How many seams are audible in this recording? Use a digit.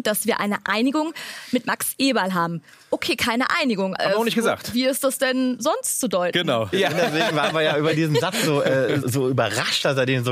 3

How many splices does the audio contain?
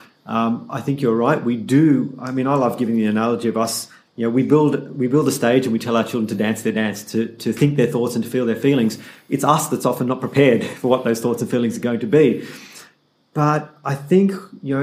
0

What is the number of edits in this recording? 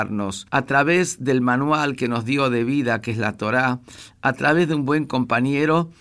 1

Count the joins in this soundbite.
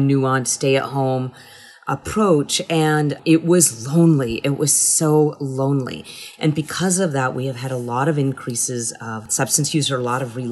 0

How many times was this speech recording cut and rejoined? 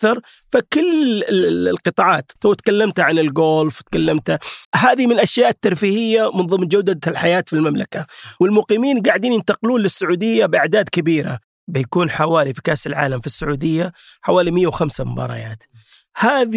2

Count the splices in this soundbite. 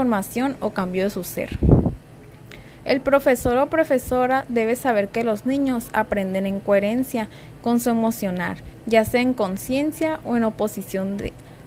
0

